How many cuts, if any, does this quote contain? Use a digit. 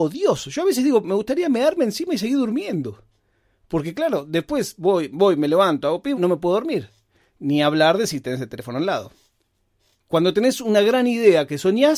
2